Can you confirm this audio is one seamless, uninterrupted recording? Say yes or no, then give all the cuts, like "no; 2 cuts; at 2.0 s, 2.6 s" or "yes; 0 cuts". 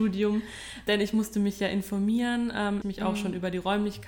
no; 1 cut; at 2.8 s